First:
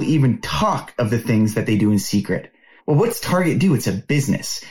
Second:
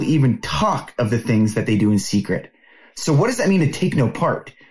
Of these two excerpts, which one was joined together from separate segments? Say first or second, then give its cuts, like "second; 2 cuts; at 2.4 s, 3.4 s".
first; 1 cut; at 2.8 s